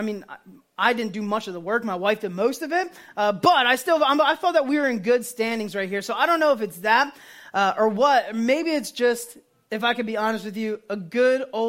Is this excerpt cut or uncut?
uncut